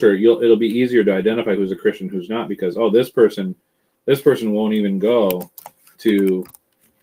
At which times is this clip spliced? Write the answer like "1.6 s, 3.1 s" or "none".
none

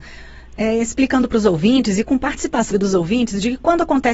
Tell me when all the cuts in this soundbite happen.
2.7 s

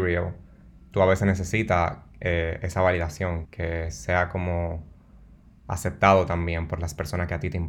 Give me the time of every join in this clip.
3.5 s

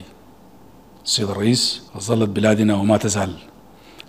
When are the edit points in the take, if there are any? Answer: 1.9 s

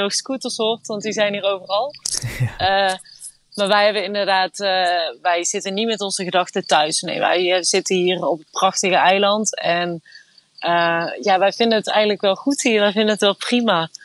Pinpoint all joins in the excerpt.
5.1 s

